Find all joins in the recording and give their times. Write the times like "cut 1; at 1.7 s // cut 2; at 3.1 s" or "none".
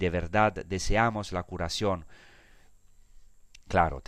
none